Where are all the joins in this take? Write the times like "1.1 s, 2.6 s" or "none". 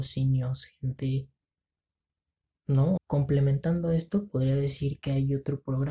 3.0 s